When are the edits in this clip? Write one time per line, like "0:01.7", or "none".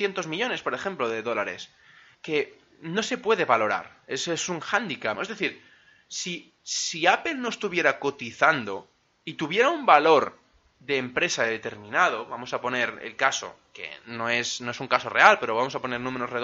0:02.1
0:05.1